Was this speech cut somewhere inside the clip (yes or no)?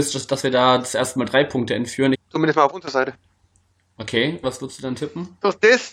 yes